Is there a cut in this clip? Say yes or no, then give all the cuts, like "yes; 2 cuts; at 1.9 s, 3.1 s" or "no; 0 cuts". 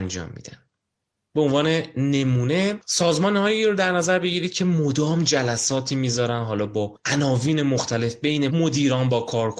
yes; 1 cut; at 8.5 s